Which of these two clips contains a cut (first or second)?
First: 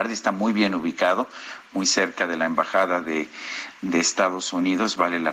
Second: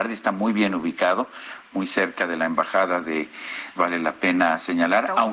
second